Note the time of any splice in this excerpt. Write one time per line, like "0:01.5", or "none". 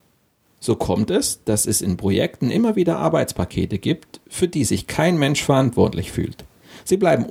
none